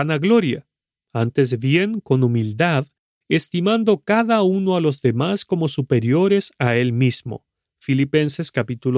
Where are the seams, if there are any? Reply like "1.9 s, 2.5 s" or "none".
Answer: none